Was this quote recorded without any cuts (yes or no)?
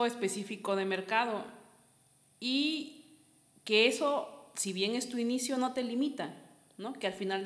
yes